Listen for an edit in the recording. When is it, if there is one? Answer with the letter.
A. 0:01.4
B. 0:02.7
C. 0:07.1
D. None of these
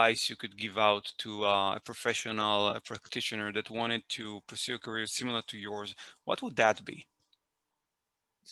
D